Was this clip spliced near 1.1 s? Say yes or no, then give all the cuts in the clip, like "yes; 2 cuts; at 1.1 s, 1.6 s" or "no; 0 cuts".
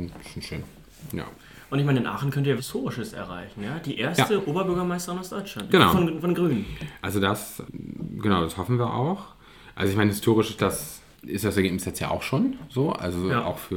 no; 1 cut; at 2.6 s